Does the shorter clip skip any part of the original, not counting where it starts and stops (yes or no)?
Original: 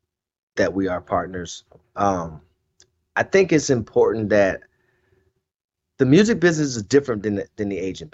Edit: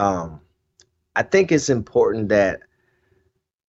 no